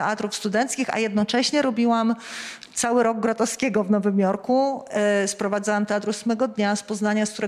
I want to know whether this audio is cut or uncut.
uncut